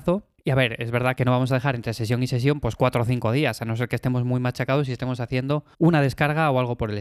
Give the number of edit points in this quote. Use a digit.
1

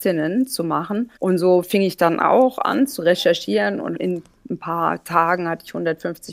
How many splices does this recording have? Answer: 1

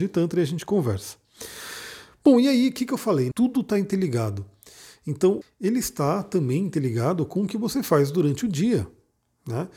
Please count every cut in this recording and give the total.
2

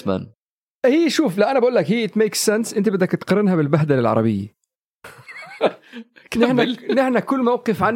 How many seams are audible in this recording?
1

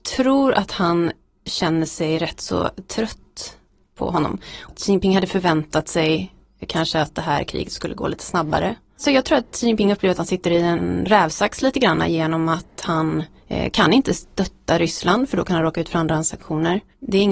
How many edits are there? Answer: 0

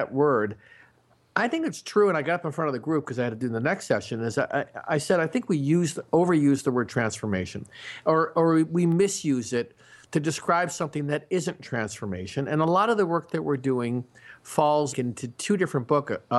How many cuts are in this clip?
1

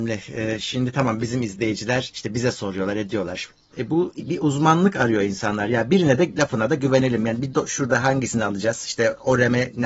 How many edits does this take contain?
1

